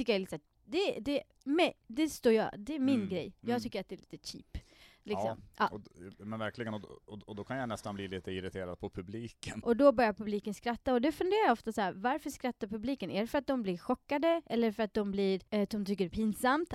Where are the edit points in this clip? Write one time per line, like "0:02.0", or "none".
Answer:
0:09.6
0:15.5